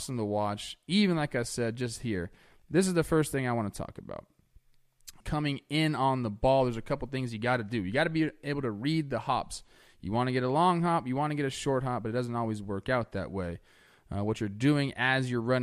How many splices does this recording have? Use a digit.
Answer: 1